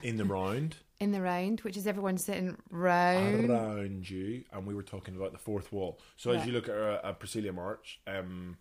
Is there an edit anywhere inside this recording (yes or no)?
no